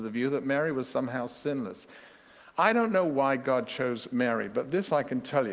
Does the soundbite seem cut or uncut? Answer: uncut